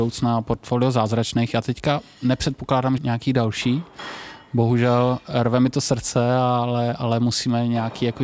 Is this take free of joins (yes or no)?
no